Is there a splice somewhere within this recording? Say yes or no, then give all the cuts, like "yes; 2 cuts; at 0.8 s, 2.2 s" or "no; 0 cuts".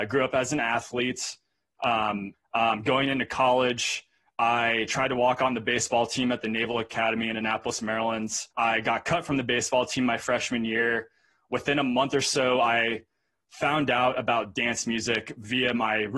yes; 2 cuts; at 2.3 s, 8.5 s